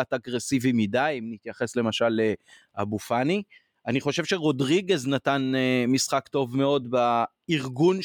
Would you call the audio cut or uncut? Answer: uncut